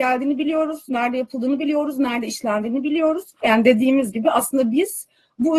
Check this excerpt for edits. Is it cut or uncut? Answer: cut